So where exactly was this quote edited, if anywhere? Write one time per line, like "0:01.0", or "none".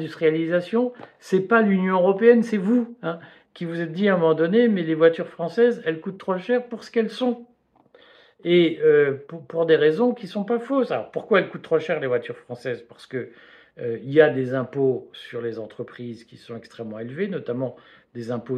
none

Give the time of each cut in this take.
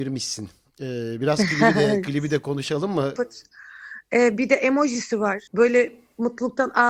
0:03.2
0:05.5

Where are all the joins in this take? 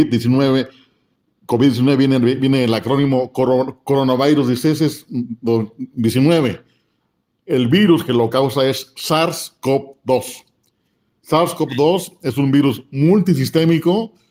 none

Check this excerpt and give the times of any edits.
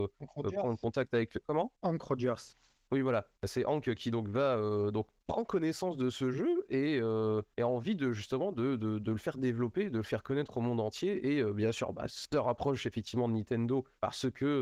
none

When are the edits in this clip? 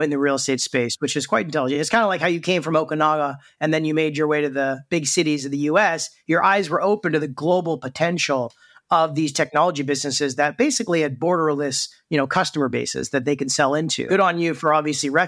none

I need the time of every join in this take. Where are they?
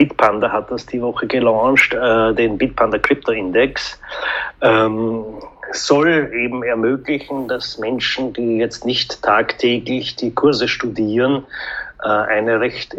none

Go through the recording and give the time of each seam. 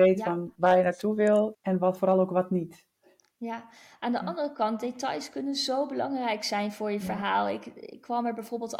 0:01.5

